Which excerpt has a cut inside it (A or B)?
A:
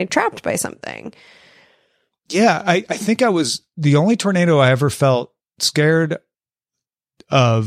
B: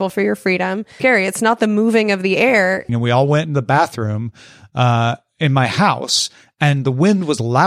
B